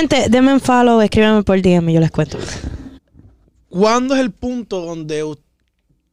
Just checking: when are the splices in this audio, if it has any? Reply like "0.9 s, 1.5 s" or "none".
3.0 s